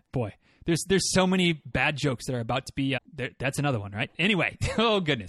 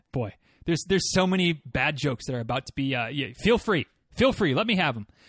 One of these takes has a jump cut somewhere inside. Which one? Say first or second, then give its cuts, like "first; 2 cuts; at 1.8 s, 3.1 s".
first; 1 cut; at 3.0 s